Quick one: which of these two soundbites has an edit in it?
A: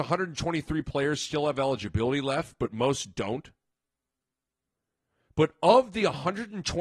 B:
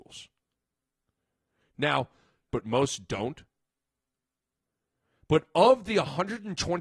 B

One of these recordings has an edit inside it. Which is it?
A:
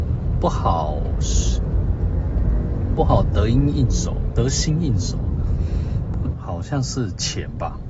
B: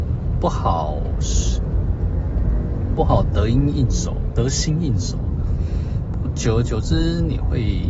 A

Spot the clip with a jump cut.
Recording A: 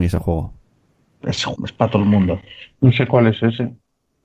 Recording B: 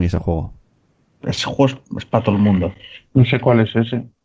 A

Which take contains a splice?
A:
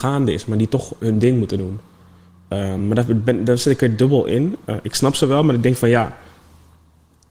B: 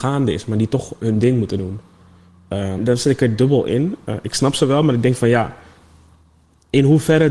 B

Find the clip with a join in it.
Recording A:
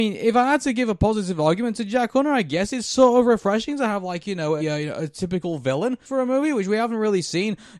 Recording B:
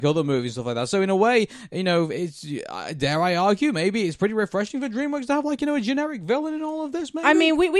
A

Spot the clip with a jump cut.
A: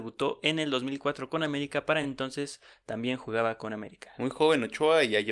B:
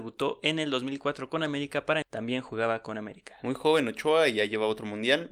B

